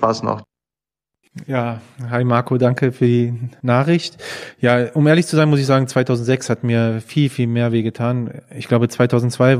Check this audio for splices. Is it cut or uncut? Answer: uncut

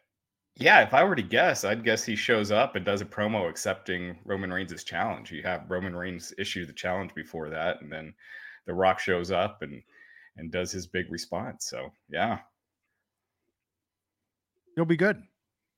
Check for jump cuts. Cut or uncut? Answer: uncut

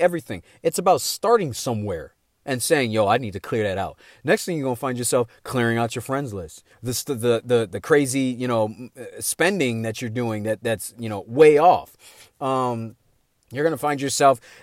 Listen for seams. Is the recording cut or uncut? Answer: cut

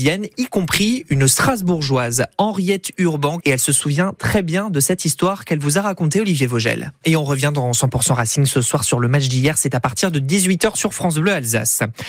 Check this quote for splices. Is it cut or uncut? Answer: cut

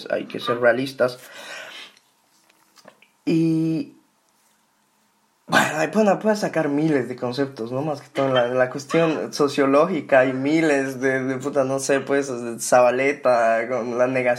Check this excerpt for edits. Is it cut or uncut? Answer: uncut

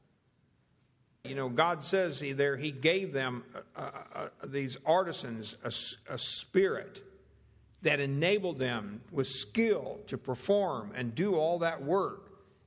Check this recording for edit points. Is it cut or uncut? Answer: cut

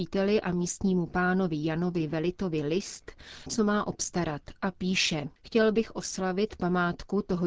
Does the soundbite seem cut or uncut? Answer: cut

